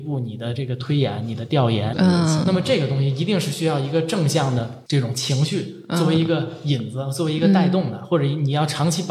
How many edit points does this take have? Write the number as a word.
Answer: one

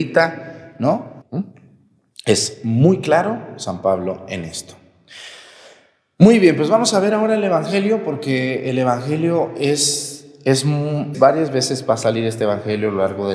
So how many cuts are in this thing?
two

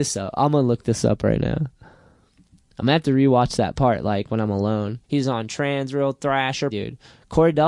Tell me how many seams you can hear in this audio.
two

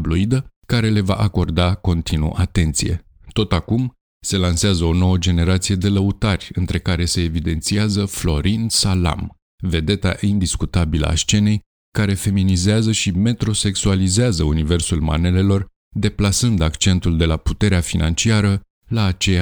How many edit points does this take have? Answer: zero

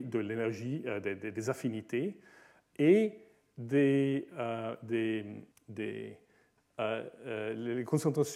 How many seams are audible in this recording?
two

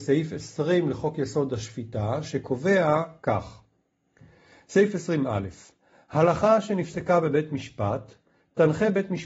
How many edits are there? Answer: zero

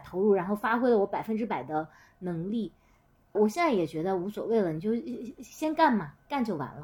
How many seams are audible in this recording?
one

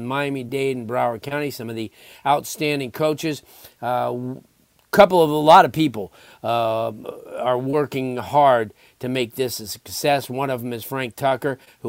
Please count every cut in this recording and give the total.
zero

